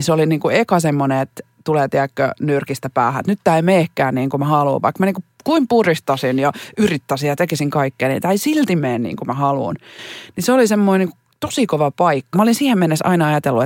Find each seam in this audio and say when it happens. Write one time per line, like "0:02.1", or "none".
0:12.3